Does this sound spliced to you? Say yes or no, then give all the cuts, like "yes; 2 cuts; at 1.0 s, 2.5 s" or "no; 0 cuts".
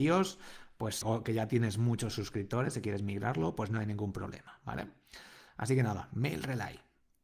yes; 1 cut; at 1.0 s